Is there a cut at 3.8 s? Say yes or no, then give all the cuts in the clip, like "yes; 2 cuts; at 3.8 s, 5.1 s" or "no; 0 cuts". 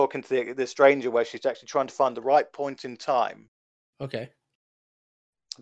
yes; 1 cut; at 3.8 s